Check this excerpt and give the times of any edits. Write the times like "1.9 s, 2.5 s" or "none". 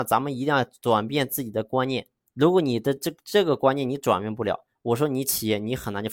none